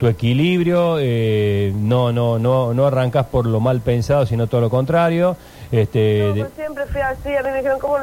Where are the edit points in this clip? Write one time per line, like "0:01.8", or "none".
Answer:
none